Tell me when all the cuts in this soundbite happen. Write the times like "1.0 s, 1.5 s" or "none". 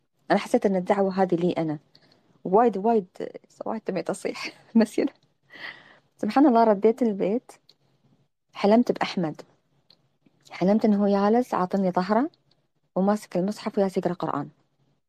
none